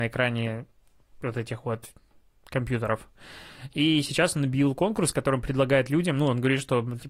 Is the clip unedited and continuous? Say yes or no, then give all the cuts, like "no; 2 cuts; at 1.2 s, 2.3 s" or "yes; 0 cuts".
yes; 0 cuts